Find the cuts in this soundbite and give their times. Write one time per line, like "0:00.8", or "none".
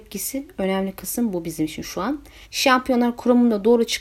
0:02.4